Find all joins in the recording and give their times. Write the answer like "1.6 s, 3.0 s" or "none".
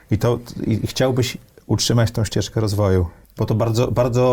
none